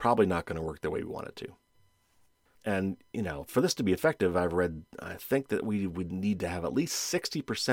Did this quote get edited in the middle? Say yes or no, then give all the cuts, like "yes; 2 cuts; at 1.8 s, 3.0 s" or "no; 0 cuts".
yes; 1 cut; at 2.6 s